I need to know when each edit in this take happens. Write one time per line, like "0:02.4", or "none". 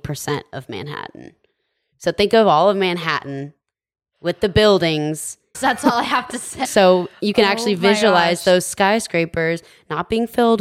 0:05.5
0:06.6